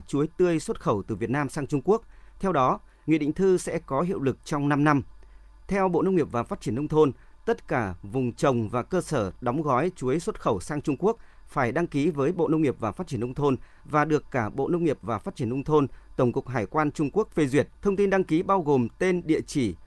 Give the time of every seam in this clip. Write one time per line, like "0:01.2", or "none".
0:17.8